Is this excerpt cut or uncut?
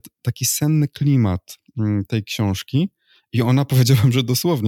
uncut